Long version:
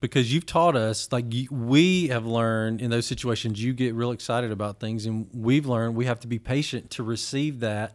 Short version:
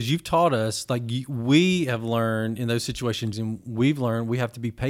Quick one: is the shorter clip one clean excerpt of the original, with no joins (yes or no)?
no